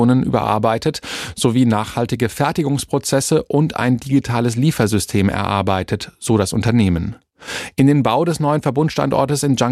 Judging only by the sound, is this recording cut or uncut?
uncut